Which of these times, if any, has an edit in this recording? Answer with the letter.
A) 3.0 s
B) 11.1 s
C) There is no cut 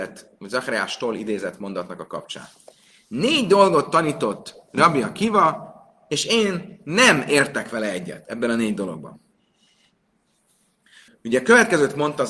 B